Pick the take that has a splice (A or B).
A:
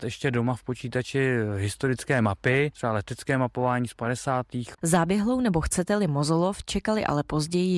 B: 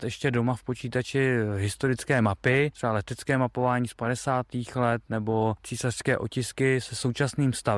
A